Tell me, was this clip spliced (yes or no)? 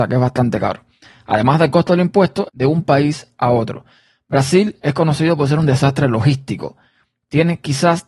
yes